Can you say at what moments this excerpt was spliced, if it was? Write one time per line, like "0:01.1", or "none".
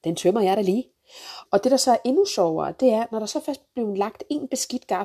0:01.4